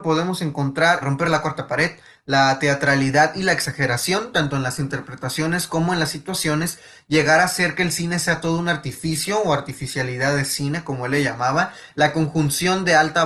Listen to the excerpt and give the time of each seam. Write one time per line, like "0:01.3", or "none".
0:01.0